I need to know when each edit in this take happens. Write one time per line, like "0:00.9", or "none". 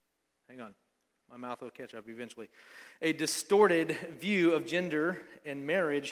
none